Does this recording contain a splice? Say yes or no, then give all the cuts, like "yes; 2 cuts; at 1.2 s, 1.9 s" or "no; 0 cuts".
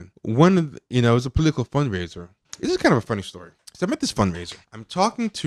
no; 0 cuts